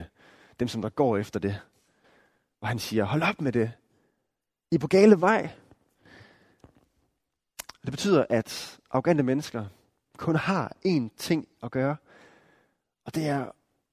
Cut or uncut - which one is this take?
cut